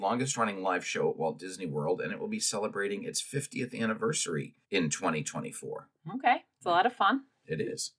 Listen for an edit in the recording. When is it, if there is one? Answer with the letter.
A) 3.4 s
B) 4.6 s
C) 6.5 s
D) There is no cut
B